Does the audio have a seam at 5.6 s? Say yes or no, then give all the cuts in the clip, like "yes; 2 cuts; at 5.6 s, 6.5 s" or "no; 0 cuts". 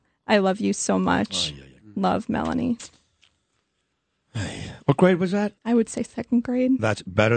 yes; 1 cut; at 5.6 s